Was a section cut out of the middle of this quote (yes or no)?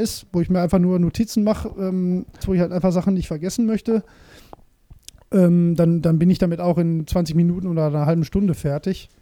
yes